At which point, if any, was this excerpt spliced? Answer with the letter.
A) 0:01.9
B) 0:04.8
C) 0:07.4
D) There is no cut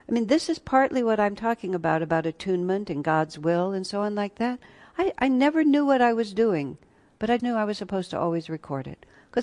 C